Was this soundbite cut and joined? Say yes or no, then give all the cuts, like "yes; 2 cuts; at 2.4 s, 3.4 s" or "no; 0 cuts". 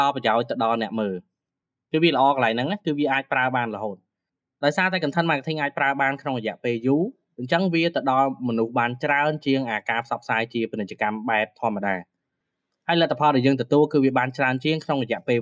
no; 0 cuts